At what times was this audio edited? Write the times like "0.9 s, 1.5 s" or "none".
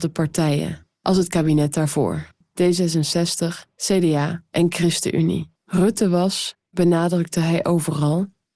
2.4 s, 5.6 s